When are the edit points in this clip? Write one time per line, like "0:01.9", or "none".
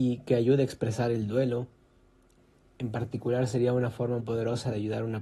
0:04.2

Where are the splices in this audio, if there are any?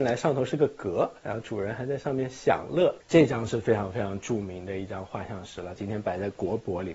0:03.0
0:05.8

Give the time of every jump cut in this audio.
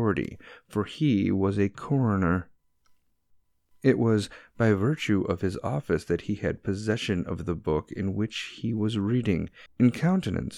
0:09.7

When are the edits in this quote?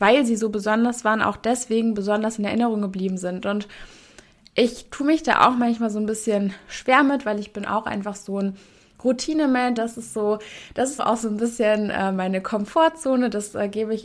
0:09.8
0:11.0

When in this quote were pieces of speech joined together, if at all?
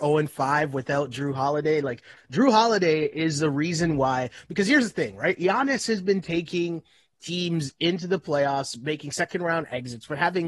none

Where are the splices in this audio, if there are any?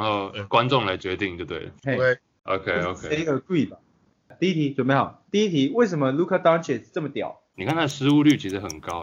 0:05.3
0:07.5

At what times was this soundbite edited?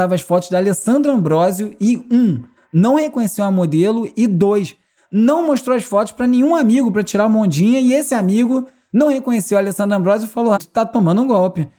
0:10.6

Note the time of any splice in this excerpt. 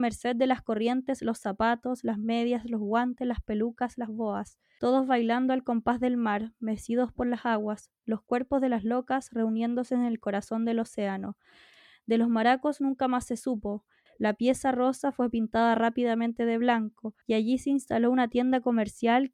0:04.8
0:14.1
0:17.2

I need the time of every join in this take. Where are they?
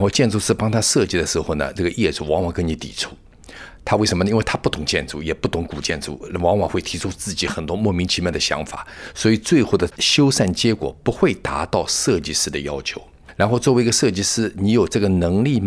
none

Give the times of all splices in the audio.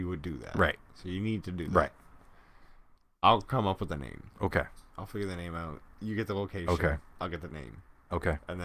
none

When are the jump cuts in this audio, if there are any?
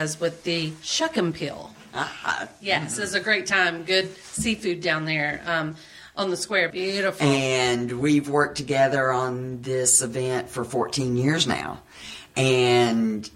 0:06.7

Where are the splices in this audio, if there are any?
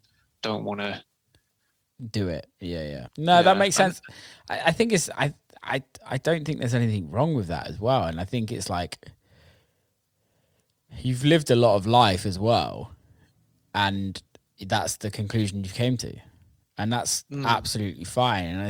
0:03.1

